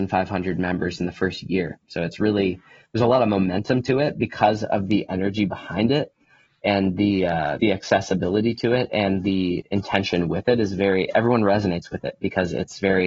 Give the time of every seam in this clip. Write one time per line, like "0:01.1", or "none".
0:07.6